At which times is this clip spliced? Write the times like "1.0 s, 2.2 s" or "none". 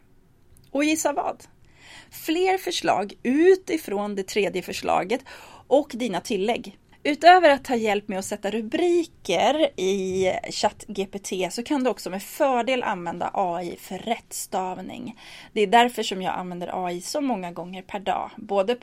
6.9 s